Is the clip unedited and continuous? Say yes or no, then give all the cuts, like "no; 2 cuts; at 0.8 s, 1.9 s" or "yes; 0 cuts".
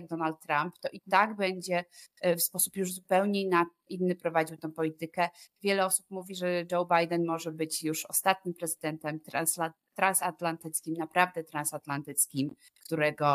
yes; 0 cuts